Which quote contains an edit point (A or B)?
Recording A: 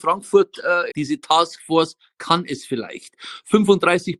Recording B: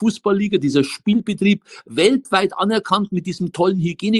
A